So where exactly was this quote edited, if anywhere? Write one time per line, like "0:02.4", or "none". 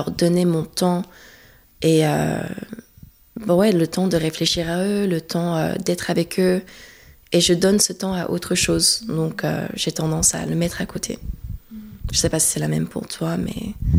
none